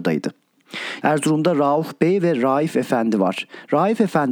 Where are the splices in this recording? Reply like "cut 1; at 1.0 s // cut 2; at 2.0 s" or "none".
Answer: cut 1; at 1.0 s